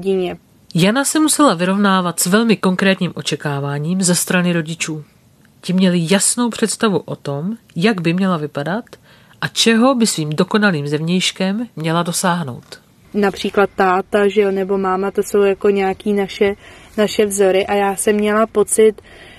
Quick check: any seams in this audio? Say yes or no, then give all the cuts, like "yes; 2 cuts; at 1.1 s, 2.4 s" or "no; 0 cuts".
no; 0 cuts